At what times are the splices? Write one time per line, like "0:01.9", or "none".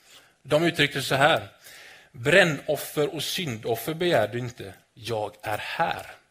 0:04.8